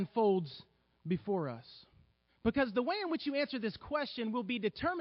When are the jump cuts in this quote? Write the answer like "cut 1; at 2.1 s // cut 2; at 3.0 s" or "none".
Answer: cut 1; at 2.3 s